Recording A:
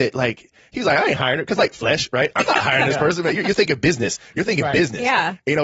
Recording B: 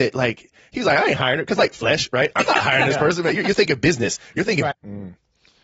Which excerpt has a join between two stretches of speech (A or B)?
B